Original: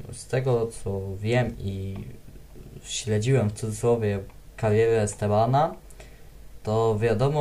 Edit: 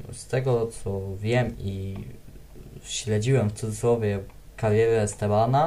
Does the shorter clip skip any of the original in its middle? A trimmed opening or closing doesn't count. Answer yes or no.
no